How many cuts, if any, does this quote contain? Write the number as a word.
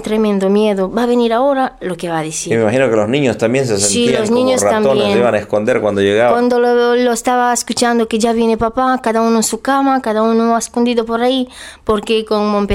zero